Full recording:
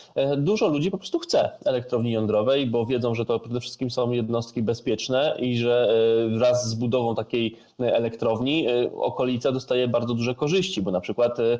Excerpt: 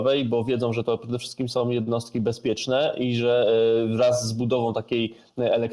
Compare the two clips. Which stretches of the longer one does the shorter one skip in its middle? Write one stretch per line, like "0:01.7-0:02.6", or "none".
none